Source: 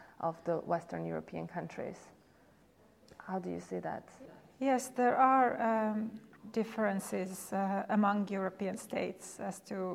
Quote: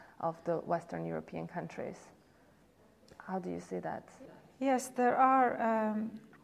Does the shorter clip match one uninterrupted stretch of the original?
yes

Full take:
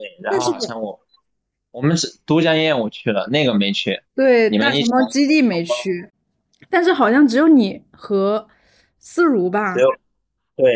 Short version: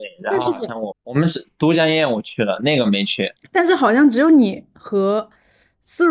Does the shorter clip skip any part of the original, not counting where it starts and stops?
yes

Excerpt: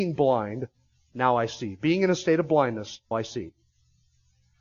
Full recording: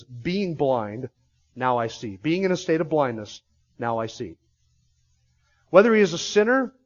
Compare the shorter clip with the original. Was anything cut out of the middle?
yes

